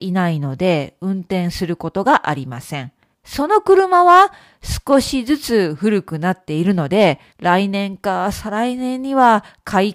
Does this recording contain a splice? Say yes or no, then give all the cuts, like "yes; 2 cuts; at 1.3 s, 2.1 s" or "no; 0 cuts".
yes; 2 cuts; at 3.1 s, 7.3 s